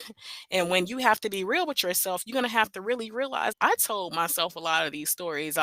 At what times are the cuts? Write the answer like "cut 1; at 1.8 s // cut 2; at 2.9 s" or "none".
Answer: cut 1; at 3.5 s